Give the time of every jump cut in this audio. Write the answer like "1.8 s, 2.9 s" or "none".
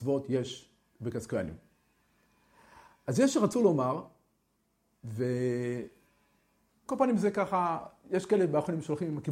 6.9 s